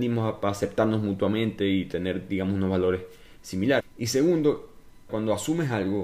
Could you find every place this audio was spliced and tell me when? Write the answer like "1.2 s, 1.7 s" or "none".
3.8 s, 5.1 s